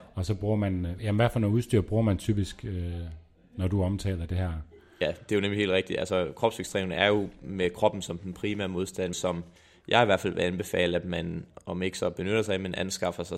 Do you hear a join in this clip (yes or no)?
yes